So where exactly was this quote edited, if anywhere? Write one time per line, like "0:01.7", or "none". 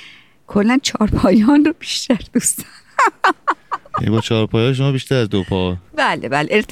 none